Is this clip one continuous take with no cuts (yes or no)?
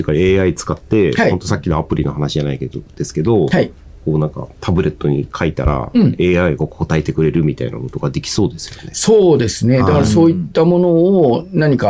yes